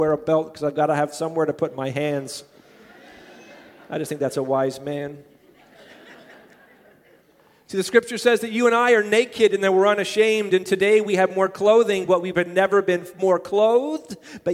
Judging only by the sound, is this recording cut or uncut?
uncut